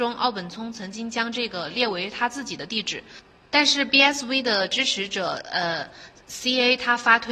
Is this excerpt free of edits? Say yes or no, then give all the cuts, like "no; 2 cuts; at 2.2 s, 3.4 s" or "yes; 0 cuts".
yes; 0 cuts